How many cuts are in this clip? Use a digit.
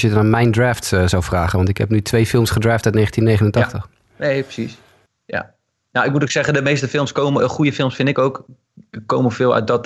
0